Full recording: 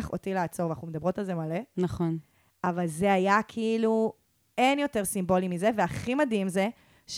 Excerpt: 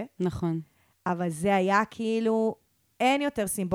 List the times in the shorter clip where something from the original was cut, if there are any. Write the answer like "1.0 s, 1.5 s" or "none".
none